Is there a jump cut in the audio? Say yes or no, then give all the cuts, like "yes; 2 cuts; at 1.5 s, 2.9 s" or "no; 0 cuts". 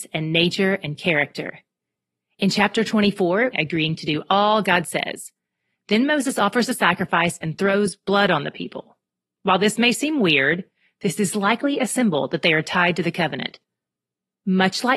yes; 1 cut; at 3.5 s